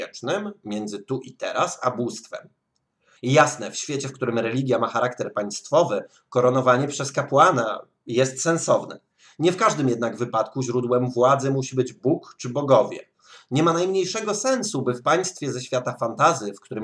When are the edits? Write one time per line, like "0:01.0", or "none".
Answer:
0:03.2